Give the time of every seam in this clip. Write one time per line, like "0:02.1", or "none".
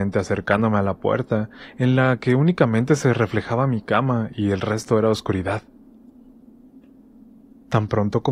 none